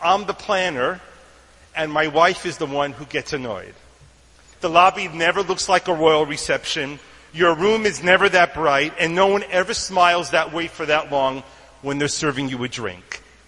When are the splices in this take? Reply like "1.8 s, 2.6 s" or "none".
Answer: 4.5 s